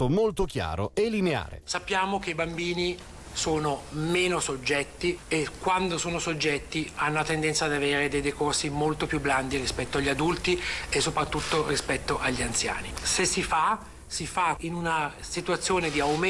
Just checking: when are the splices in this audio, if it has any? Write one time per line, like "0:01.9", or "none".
0:12.9